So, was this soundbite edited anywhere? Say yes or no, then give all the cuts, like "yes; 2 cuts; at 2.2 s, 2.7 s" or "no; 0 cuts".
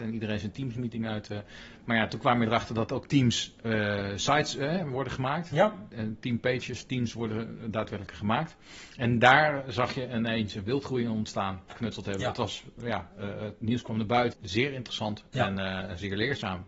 yes; 2 cuts; at 11.7 s, 14.3 s